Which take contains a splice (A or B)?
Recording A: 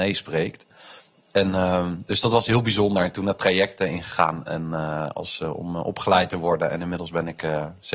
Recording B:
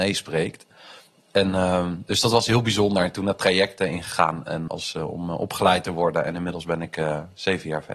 B